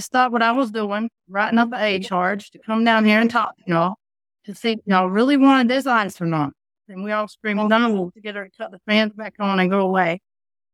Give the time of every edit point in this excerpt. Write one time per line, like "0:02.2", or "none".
0:06.9
0:08.1